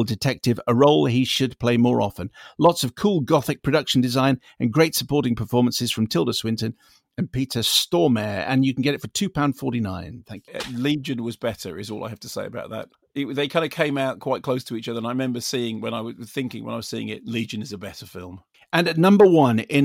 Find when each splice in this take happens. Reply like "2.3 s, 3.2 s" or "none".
none